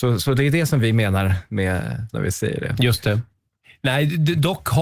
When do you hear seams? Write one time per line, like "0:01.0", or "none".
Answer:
0:02.1